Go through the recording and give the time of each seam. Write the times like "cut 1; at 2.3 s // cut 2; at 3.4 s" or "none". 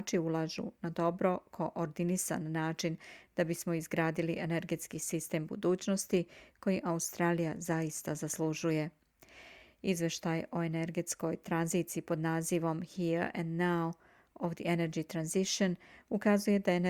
none